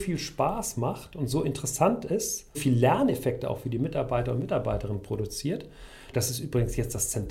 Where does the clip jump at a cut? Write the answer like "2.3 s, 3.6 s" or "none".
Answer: 2.5 s, 6.1 s